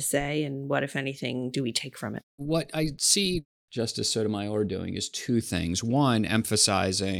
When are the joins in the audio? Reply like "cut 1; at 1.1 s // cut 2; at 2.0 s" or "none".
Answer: cut 1; at 2.3 s